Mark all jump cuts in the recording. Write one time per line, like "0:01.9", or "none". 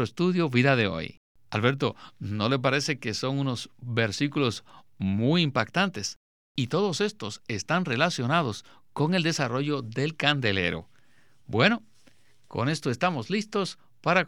0:01.3